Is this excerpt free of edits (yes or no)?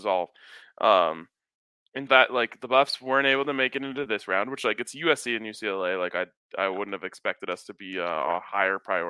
no